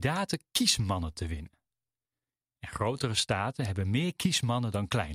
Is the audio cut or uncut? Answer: uncut